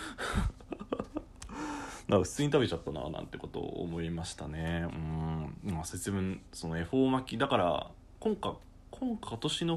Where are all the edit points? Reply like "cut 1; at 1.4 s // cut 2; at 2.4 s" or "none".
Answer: none